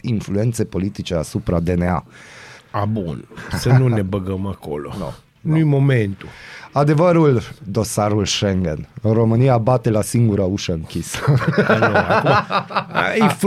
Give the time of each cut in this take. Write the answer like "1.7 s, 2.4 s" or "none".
2.6 s